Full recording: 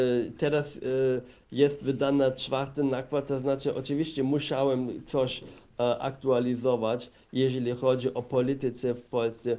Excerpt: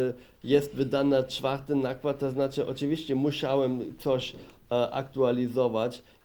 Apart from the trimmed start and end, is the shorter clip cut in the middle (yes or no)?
no